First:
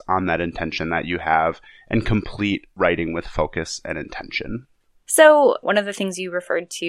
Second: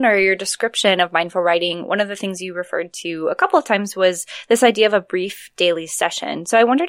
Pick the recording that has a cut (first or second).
first